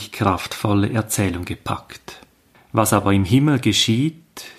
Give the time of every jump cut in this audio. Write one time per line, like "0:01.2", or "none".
0:02.5